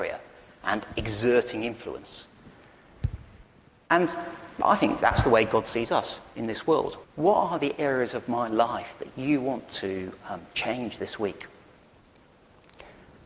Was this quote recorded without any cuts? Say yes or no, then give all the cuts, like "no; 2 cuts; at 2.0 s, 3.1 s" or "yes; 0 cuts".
no; 1 cut; at 7.0 s